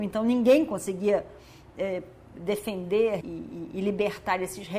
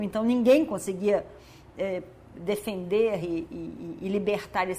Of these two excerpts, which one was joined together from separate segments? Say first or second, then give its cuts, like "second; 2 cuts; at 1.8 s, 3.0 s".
first; 1 cut; at 3.2 s